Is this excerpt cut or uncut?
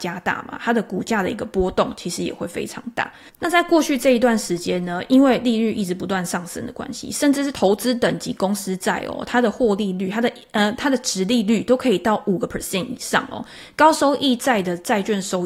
uncut